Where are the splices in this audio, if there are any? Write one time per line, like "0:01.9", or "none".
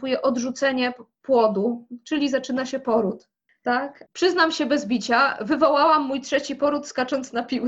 none

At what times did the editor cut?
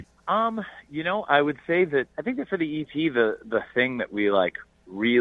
0:02.1

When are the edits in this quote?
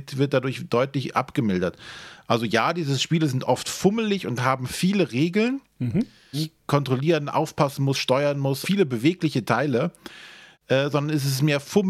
0:06.3
0:08.6
0:10.5

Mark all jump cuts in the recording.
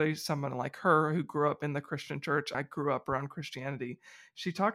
0:02.5

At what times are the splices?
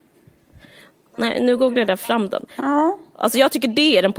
0:02.6

